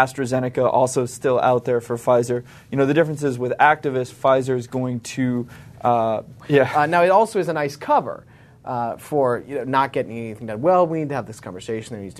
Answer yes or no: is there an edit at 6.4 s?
yes